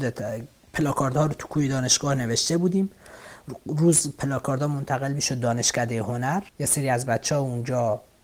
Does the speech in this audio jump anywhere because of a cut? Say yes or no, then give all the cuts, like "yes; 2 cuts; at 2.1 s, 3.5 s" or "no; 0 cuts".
yes; 1 cut; at 6.5 s